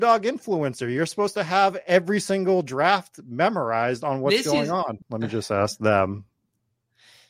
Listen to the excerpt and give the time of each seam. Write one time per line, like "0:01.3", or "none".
0:05.0